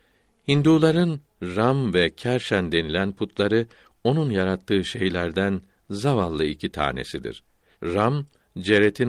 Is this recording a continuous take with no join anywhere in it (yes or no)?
no